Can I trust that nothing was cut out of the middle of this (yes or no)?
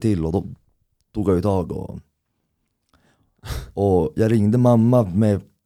yes